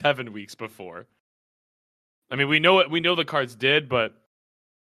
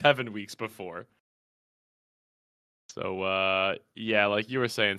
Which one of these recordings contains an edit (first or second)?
first